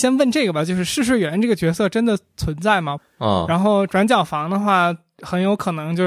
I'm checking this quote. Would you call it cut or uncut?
cut